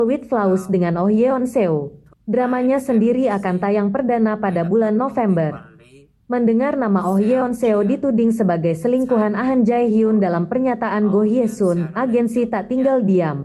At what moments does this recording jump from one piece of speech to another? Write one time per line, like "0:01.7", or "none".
0:02.1